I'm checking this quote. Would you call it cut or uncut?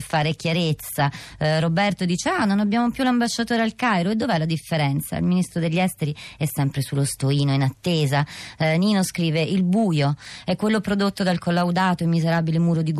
uncut